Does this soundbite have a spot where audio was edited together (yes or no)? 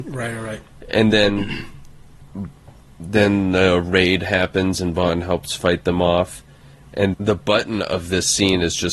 yes